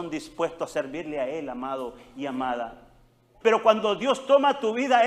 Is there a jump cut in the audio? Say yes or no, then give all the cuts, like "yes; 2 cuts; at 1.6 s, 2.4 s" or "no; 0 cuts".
yes; 1 cut; at 3.4 s